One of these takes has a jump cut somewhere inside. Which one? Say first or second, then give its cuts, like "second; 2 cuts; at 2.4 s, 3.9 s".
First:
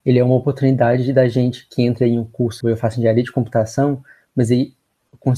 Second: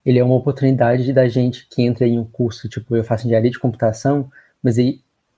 first; 1 cut; at 2.6 s